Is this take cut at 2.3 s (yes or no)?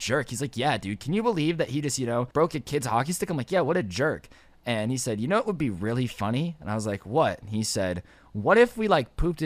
yes